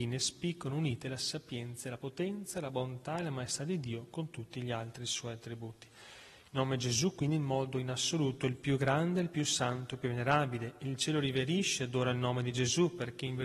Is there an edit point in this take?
no; 0 cuts

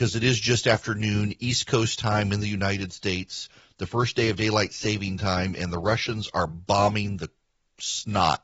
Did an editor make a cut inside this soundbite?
no; 0 cuts

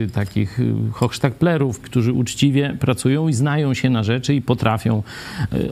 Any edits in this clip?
yes; 1 cut; at 1.8 s

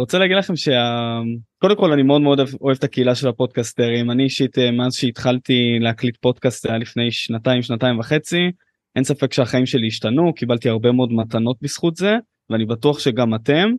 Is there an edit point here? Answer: no; 0 cuts

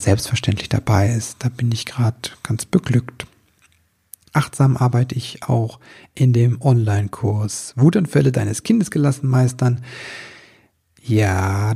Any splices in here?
no; 0 cuts

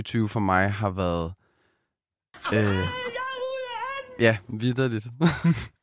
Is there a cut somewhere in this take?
no; 0 cuts

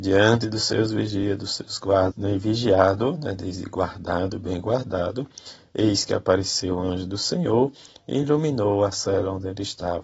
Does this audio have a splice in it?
yes; 1 cut; at 2.1 s

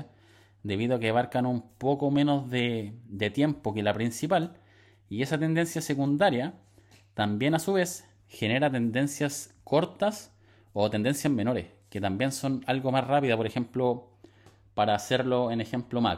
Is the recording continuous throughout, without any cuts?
yes; 0 cuts

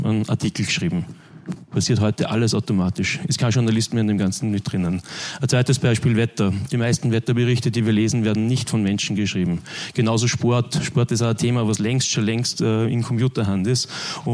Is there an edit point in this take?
no; 0 cuts

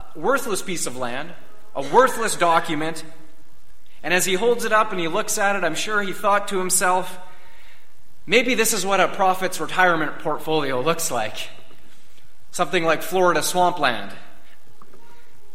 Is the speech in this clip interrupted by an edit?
no; 0 cuts

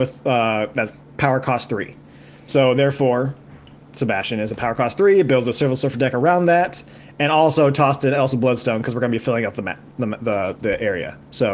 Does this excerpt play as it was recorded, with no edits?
yes; 0 cuts

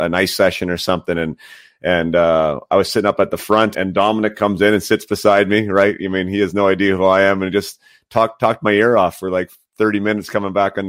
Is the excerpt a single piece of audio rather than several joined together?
no; 1 cut; at 3.7 s

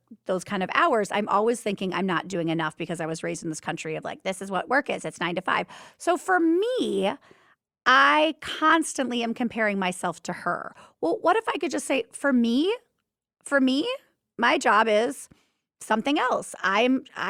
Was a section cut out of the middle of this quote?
no; 0 cuts

